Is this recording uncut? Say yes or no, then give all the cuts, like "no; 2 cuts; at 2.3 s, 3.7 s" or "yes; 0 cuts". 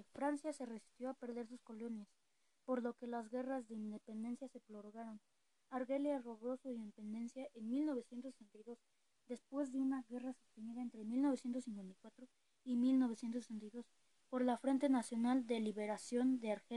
yes; 0 cuts